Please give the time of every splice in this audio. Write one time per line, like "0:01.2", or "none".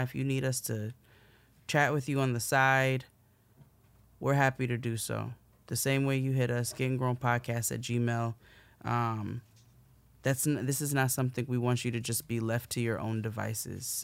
none